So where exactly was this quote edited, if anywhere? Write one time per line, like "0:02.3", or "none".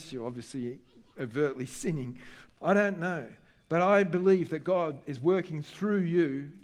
0:02.5